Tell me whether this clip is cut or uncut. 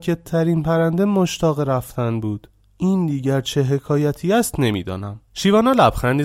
cut